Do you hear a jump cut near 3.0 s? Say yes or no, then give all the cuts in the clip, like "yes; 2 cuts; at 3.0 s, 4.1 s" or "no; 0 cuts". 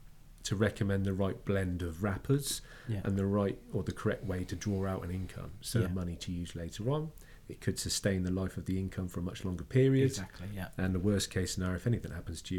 no; 1 cut; at 5.9 s